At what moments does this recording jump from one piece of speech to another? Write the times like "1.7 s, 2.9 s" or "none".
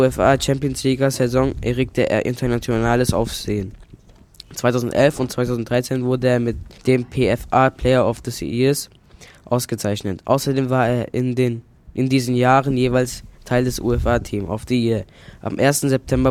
6.8 s